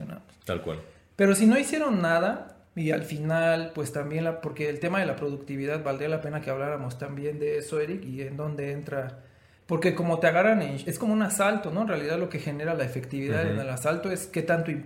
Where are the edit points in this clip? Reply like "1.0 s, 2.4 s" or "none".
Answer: 9.6 s

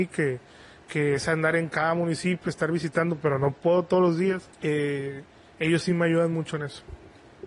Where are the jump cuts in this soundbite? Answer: 4.5 s

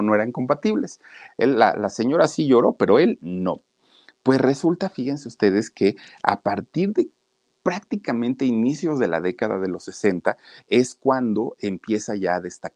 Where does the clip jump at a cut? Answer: 1.3 s

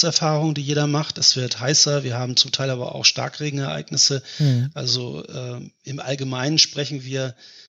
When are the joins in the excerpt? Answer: none

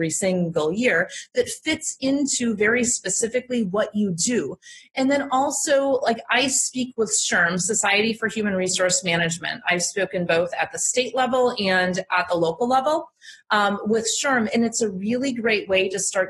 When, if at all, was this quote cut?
none

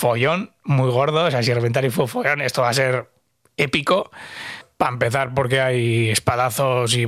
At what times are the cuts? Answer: none

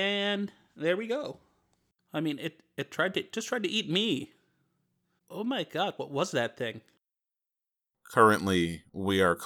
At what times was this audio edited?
2.0 s, 5.2 s

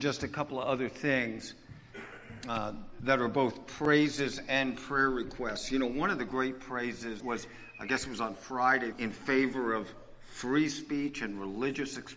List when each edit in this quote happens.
7.2 s, 8.9 s

